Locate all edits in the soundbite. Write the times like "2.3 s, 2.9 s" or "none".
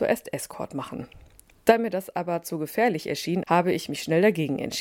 3.4 s